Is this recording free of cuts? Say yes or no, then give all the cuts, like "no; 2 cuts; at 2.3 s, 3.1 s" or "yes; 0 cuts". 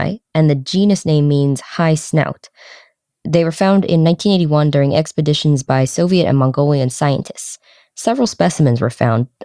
no; 1 cut; at 3.1 s